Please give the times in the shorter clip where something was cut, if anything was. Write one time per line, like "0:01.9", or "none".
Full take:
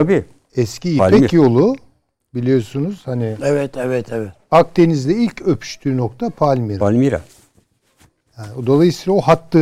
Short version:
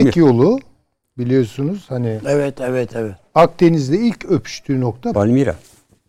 0:05.1